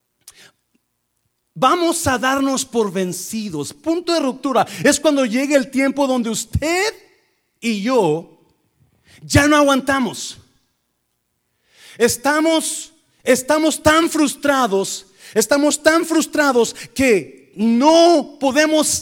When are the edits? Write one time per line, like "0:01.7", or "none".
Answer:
none